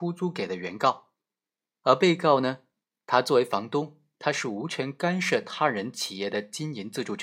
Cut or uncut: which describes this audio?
uncut